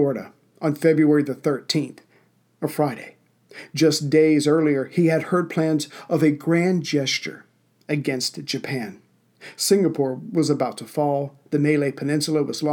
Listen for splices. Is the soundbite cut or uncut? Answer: uncut